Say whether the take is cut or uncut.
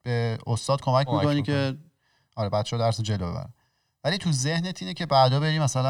uncut